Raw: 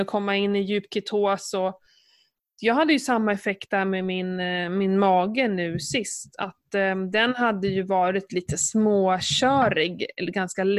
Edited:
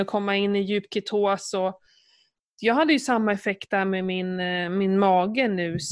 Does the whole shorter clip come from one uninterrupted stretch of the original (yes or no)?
yes